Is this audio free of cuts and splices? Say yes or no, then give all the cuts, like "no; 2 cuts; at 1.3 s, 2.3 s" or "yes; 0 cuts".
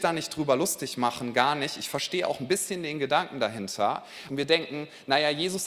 no; 1 cut; at 4.3 s